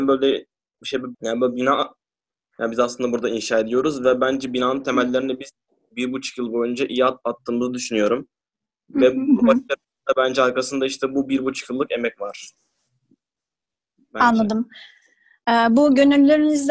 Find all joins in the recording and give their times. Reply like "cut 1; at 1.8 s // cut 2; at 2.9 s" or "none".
cut 1; at 1.1 s